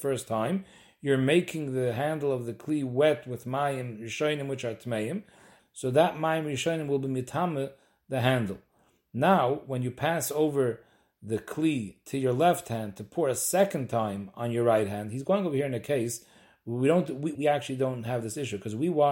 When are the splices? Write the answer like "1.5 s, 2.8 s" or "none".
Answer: 5.6 s, 17.3 s